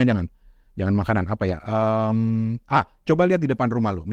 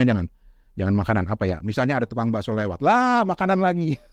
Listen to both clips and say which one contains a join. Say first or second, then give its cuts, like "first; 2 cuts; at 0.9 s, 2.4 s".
second; 1 cut; at 1.6 s